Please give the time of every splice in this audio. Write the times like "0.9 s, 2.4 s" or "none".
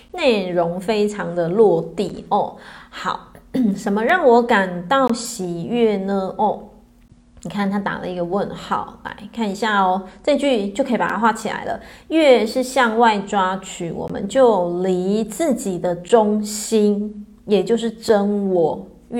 none